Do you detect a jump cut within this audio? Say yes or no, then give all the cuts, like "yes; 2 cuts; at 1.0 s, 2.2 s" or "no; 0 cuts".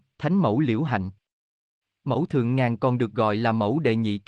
no; 0 cuts